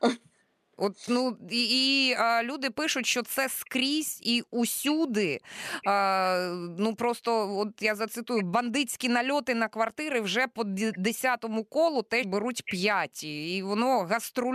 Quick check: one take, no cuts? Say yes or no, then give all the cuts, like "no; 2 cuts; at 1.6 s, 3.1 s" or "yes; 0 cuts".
no; 1 cut; at 12.2 s